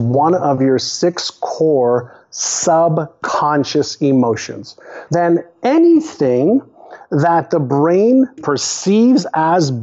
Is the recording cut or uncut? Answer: cut